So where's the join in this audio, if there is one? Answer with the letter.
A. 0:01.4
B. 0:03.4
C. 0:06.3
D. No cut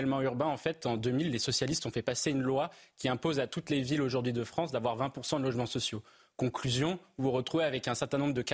D